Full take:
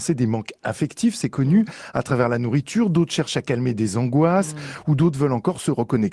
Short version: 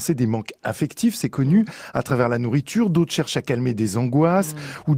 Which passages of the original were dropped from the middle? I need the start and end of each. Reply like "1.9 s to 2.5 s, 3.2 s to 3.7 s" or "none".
none